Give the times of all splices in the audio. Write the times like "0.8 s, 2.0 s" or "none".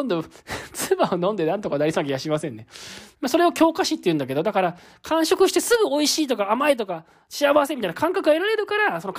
3.1 s